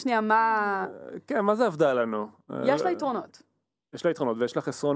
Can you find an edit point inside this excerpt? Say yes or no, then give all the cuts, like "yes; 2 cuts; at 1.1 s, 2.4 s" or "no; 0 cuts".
no; 0 cuts